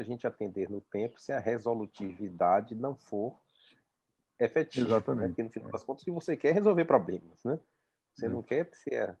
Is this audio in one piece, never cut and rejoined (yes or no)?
yes